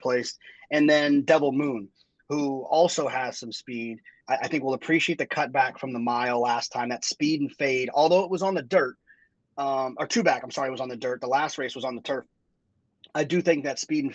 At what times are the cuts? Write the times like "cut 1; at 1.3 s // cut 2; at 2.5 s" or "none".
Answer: none

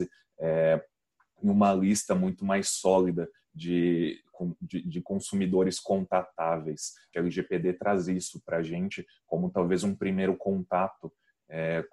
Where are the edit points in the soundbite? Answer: cut 1; at 7.1 s

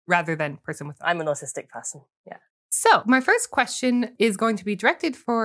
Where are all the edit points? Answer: cut 1; at 2.5 s

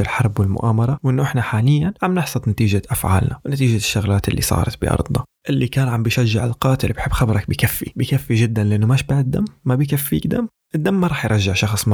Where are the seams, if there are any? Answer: none

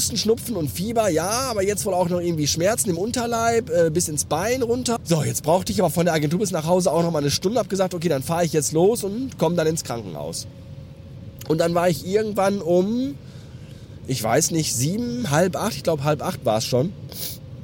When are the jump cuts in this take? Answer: cut 1; at 5.0 s

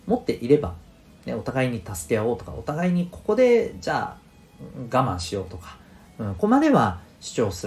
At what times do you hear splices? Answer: cut 1; at 6.4 s

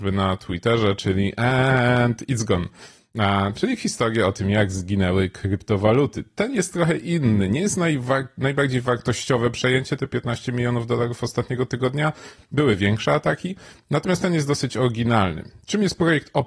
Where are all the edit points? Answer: none

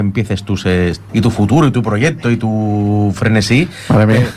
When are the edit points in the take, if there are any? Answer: cut 1; at 1.1 s

